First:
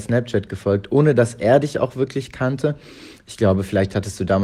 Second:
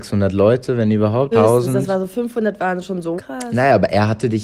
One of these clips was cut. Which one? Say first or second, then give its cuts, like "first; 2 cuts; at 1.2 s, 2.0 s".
second; 2 cuts; at 1.3 s, 3.2 s